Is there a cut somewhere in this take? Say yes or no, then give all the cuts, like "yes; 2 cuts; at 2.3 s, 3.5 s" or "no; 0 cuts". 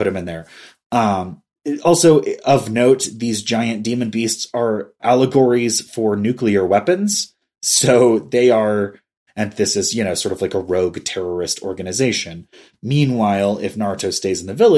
yes; 2 cuts; at 5.0 s, 9.3 s